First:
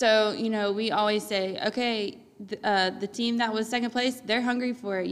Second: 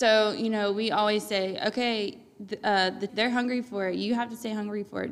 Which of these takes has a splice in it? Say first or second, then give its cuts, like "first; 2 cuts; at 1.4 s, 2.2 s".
second; 1 cut; at 3.1 s